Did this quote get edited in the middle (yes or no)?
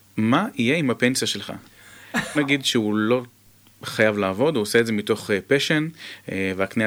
yes